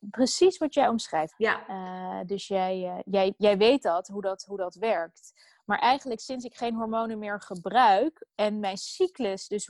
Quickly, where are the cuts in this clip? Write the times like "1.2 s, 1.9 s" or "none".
1.3 s